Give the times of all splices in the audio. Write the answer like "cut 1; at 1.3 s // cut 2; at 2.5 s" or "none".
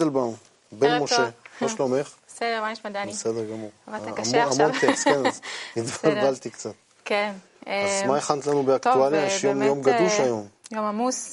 none